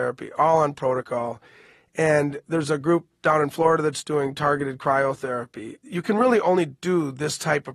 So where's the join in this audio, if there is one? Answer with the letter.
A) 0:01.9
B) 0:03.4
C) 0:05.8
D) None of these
D